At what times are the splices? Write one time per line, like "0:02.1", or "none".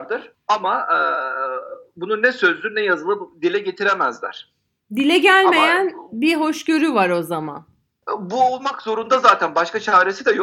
none